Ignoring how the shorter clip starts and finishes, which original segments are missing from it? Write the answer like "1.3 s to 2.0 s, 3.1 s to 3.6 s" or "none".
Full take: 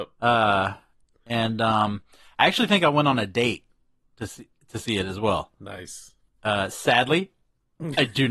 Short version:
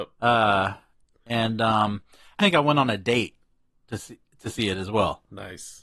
2.4 s to 2.7 s

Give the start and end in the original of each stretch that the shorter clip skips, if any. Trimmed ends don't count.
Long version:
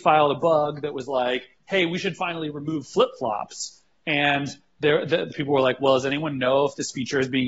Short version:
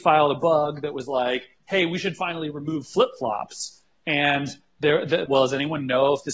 5.3 s to 5.8 s

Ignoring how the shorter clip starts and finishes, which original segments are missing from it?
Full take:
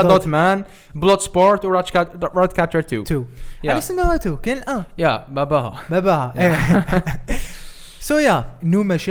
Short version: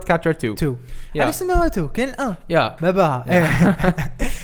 5.3 s to 5.9 s

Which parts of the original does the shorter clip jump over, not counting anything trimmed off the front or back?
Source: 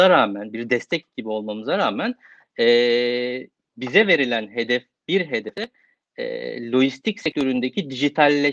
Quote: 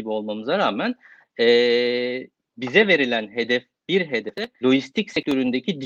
5.8 s to 6.7 s

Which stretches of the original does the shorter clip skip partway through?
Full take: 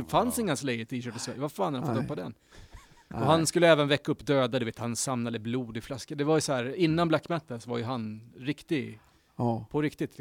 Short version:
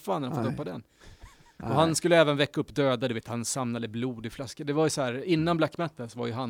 none

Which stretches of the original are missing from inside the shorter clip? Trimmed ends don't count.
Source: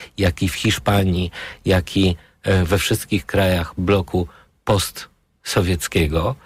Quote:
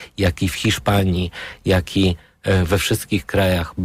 none

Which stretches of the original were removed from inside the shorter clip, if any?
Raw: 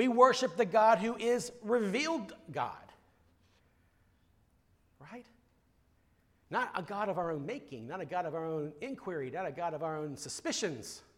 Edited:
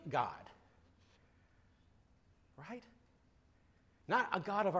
none

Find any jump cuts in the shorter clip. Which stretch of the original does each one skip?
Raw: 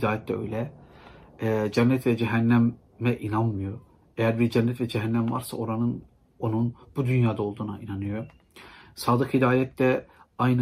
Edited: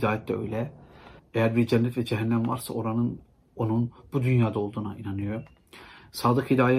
1.2 s to 4.0 s

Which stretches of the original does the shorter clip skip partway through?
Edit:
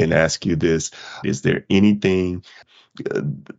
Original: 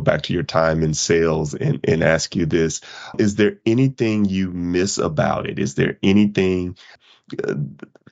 3.1 s to 5.6 s

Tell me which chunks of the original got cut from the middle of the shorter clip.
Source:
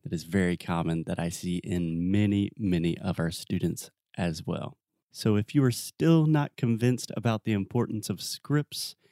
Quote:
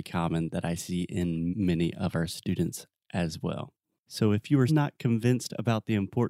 2.0 s to 2.5 s, 5.7 s to 6.3 s

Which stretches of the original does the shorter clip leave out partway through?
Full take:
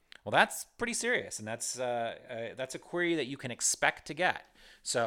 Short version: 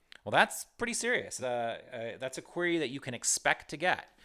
1.4 s to 1.8 s

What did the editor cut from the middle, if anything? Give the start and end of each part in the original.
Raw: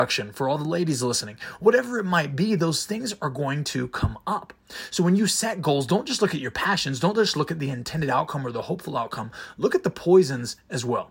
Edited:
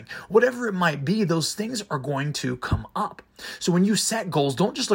none

